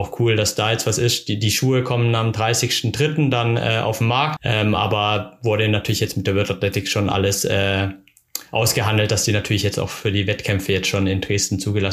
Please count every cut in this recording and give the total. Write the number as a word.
one